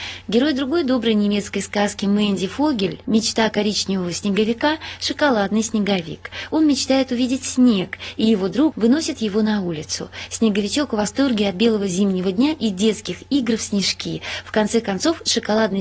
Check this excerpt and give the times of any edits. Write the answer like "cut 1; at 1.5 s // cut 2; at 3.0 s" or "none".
cut 1; at 8.7 s